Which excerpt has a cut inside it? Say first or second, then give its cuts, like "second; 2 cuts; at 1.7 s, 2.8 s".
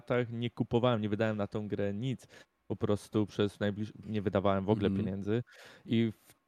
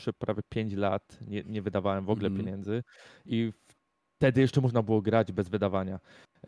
first; 1 cut; at 4.0 s